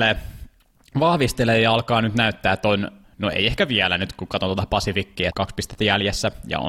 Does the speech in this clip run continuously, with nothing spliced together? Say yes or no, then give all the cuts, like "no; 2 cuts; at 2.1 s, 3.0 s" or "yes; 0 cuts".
no; 2 cuts; at 3.0 s, 5.3 s